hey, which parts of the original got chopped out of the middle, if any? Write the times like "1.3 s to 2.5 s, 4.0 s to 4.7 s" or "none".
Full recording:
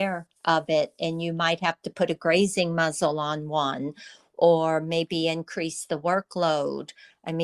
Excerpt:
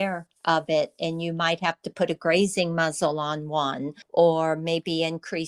4.0 s to 4.3 s